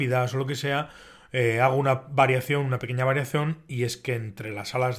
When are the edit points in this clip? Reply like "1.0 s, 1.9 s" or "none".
none